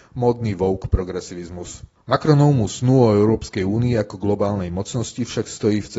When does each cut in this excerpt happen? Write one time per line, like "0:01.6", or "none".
none